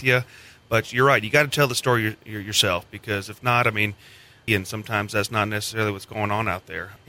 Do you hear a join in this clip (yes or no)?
yes